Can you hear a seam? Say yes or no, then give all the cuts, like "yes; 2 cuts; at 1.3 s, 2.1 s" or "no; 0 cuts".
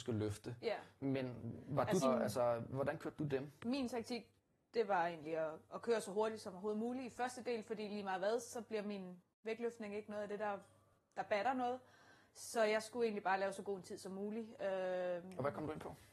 yes; 1 cut; at 2.0 s